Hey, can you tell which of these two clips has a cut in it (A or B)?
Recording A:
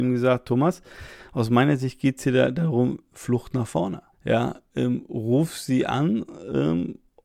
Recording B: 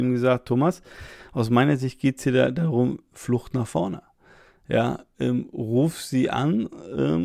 A